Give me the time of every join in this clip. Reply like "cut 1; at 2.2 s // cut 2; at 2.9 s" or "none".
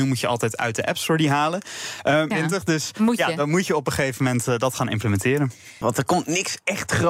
cut 1; at 2.3 s // cut 2; at 5.8 s

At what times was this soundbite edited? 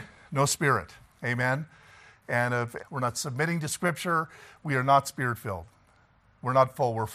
cut 1; at 2.8 s

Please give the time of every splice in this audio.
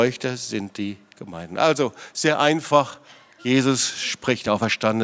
none

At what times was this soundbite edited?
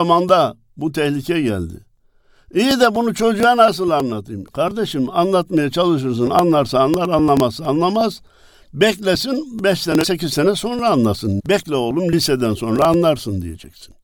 cut 1; at 10.0 s // cut 2; at 11.4 s

